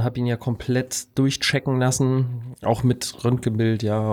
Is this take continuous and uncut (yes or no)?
yes